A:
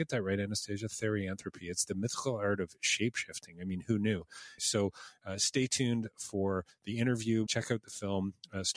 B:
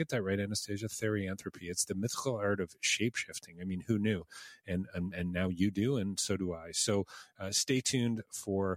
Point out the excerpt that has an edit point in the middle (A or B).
A